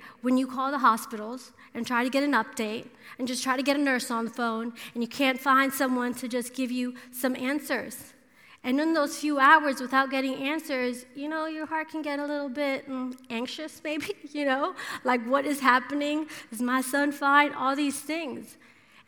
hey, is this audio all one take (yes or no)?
yes